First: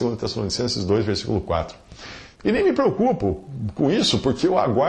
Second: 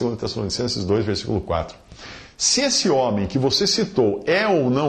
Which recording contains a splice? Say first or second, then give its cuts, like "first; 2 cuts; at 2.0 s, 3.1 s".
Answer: first; 1 cut; at 2.4 s